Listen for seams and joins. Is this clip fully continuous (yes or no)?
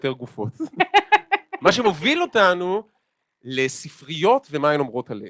no